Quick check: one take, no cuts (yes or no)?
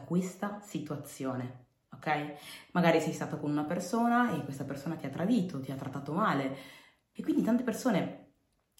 no